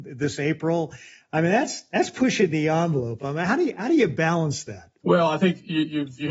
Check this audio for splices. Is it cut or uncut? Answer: uncut